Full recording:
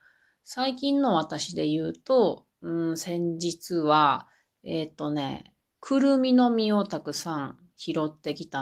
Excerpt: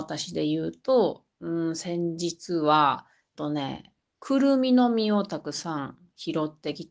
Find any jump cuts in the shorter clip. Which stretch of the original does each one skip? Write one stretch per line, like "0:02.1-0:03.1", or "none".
0:04.6-0:05.0